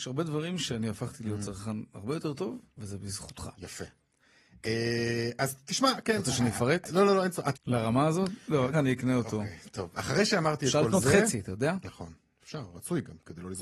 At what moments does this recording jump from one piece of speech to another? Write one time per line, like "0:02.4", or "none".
0:07.5
0:08.7

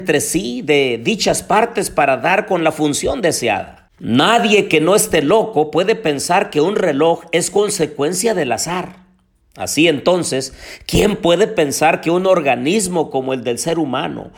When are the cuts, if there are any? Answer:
none

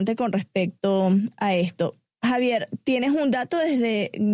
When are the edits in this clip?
none

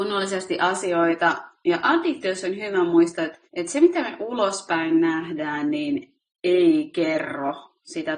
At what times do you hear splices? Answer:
0:03.5

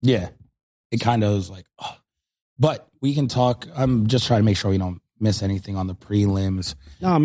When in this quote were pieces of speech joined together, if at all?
none

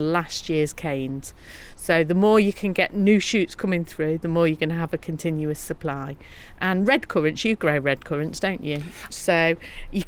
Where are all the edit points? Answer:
0:09.1

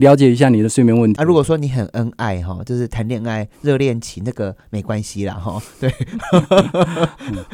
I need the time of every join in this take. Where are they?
0:01.2

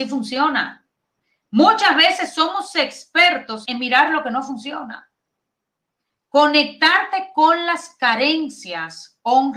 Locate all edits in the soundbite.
0:03.6

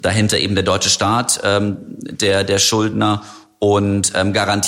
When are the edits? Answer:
none

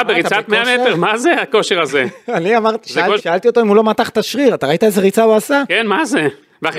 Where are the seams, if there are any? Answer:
0:03.2

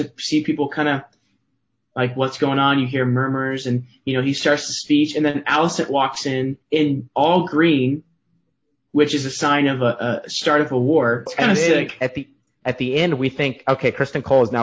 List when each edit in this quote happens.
0:06.6
0:11.3

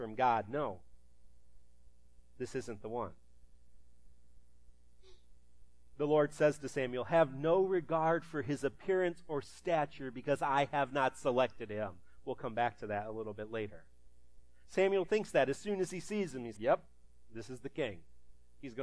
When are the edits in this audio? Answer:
0:14.7
0:16.6

